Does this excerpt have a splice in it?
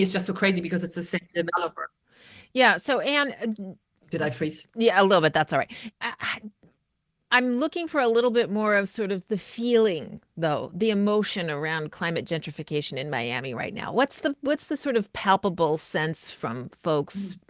yes; 1 cut; at 5.9 s

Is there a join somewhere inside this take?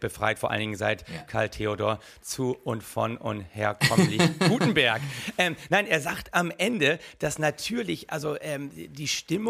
no; 0 cuts

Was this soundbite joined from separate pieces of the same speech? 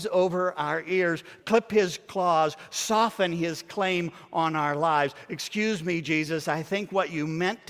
yes; 1 cut; at 1.4 s

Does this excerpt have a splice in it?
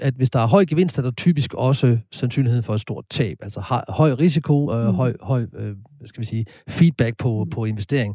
no; 0 cuts

